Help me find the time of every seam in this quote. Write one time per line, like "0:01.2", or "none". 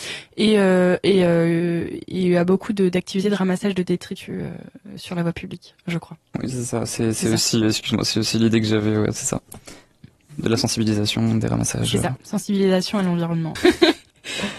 0:13.6